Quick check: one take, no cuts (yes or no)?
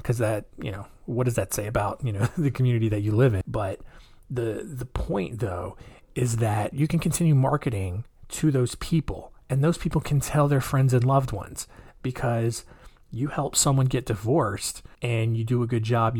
no